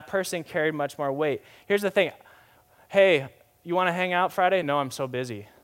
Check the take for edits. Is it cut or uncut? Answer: uncut